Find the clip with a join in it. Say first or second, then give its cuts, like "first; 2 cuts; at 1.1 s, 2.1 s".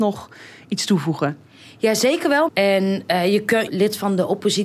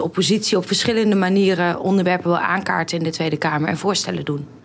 first; 2 cuts; at 2.5 s, 3.7 s